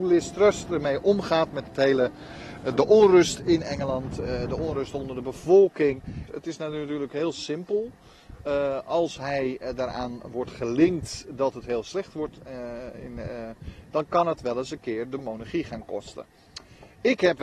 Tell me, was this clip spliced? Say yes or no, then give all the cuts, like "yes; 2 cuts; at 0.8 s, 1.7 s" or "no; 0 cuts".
yes; 1 cut; at 6.3 s